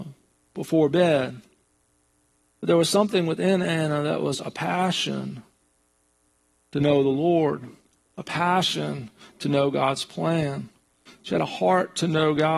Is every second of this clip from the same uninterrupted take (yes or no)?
yes